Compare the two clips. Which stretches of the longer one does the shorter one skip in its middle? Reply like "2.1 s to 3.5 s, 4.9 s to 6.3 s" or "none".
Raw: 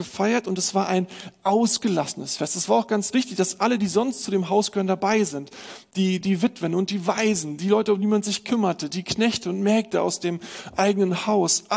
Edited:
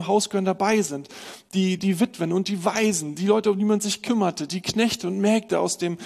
none